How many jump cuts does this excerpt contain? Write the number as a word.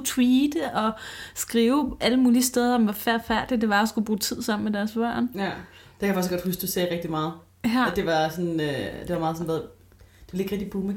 zero